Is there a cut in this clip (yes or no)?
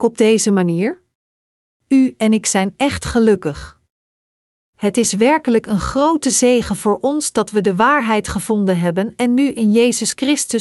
yes